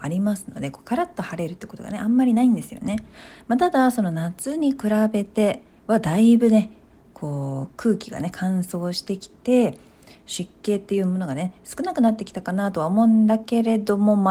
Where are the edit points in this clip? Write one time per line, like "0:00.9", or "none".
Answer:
none